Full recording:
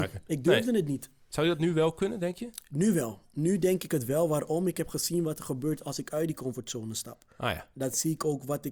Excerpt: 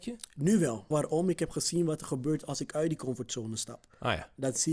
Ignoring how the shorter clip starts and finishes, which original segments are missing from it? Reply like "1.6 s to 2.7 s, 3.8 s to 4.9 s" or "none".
3.2 s to 4.3 s

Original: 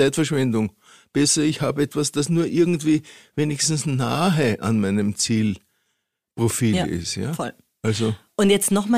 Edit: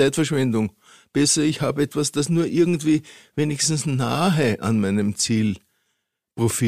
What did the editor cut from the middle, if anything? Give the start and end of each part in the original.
none

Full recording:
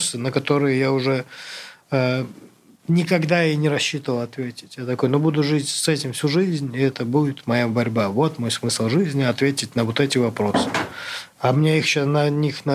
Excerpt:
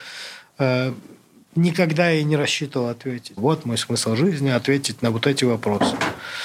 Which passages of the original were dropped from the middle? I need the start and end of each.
4.7 s to 8.1 s

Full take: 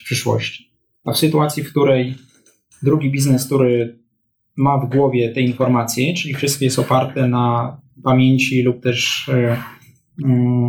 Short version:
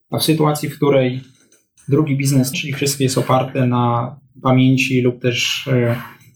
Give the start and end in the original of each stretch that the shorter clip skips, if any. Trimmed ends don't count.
3.5 s to 6.1 s

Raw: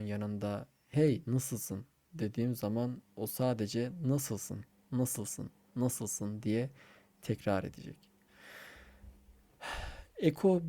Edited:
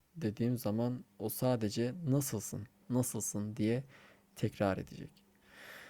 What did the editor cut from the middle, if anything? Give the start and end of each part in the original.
4.8 s to 5.7 s

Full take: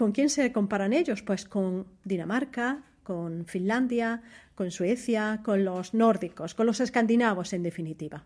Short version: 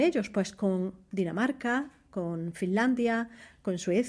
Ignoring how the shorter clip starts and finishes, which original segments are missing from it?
none

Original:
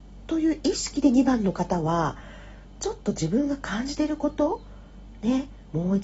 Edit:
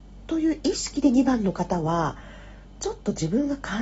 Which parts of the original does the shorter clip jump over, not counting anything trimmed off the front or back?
none

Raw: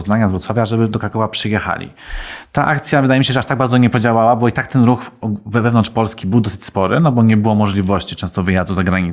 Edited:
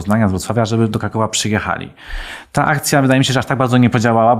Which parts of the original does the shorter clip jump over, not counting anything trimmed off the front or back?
none

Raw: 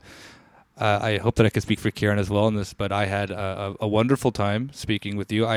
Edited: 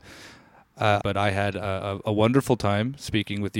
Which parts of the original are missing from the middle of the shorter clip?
1.0 s to 2.8 s

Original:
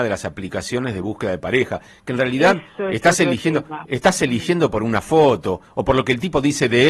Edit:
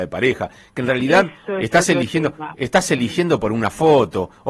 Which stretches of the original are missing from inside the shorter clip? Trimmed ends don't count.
none

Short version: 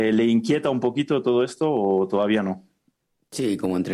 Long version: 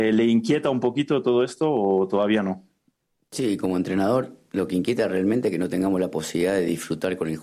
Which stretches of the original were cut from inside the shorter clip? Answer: none

